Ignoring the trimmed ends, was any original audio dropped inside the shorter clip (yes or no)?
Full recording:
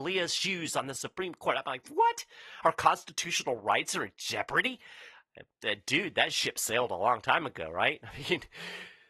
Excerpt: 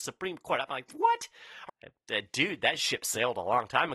yes